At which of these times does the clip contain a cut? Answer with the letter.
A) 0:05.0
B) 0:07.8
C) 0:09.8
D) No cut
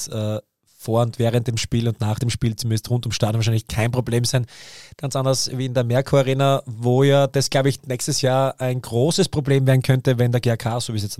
A